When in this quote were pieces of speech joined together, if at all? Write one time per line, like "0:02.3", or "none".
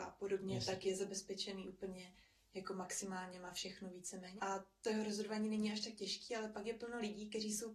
0:04.4